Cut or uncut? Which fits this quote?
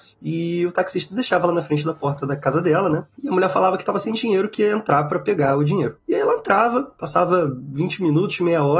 uncut